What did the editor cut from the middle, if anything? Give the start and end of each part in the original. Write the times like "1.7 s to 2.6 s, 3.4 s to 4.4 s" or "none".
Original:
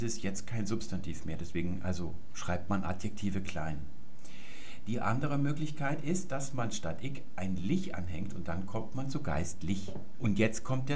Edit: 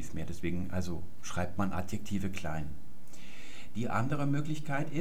none